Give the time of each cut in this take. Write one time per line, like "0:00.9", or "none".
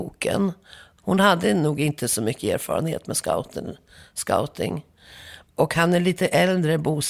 0:01.0
0:05.5